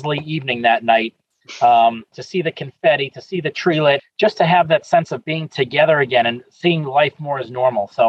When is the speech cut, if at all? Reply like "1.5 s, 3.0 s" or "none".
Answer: 2.1 s, 4.0 s